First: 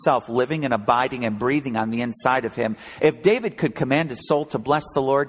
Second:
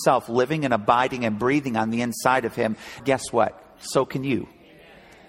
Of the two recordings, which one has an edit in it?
second; 1 cut; at 3.0 s

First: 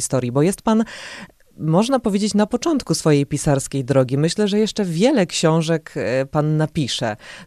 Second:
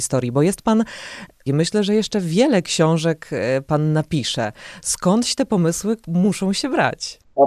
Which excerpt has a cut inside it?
second; 1 cut; at 1.5 s

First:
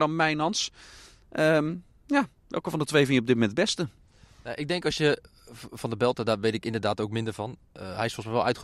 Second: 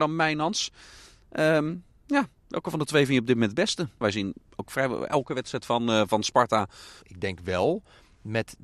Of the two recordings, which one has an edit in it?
second; 2 cuts; at 4.0 s, 7.0 s

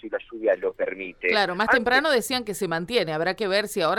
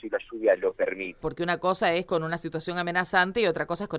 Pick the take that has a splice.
second; 1 cut; at 1.2 s

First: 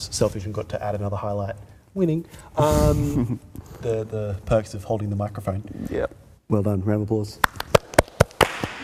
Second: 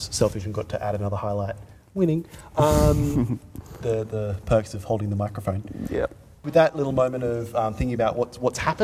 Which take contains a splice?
first; 1 cut; at 6.4 s

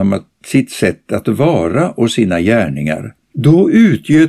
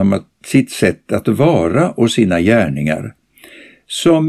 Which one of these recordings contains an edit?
first; 1 cut; at 3.3 s

